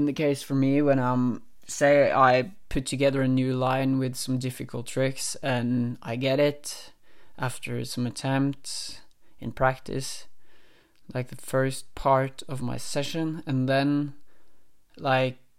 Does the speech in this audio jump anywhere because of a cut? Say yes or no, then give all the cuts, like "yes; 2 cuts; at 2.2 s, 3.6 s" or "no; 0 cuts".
no; 0 cuts